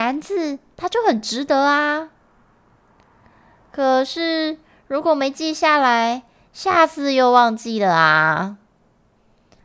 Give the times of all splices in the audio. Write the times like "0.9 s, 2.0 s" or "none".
none